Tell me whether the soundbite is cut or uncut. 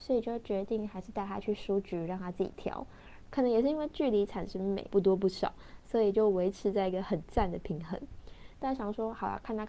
cut